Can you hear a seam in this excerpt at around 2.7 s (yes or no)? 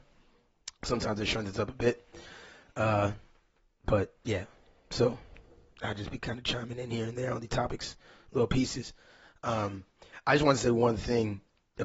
no